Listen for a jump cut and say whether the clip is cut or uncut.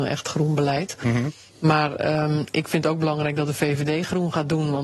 uncut